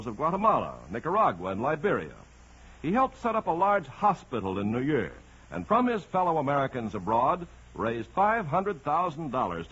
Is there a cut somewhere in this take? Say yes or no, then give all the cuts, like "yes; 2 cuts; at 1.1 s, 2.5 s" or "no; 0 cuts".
no; 0 cuts